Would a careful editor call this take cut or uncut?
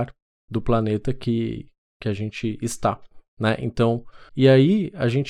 cut